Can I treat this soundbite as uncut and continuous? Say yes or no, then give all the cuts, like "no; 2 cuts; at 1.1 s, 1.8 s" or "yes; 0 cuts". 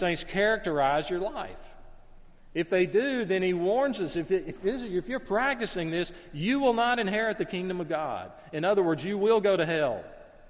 yes; 0 cuts